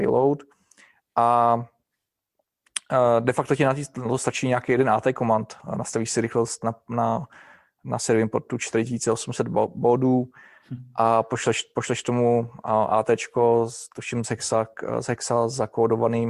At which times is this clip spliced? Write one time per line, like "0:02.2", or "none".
none